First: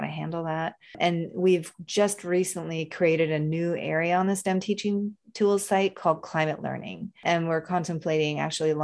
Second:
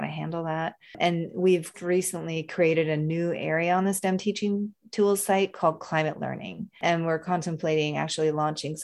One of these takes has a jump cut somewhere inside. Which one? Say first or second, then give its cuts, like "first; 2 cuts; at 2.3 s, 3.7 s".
second; 1 cut; at 1.7 s